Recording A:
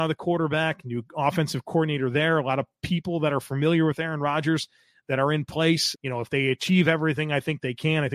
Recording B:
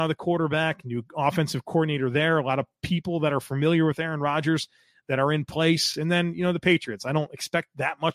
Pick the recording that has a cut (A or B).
A